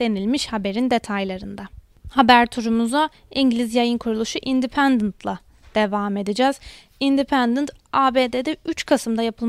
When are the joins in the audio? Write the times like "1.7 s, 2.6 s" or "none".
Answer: none